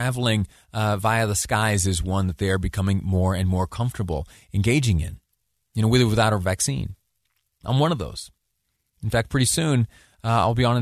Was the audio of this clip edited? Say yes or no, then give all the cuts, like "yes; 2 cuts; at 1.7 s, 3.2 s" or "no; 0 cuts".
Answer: no; 0 cuts